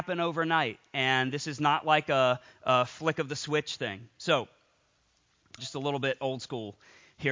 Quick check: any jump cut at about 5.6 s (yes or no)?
yes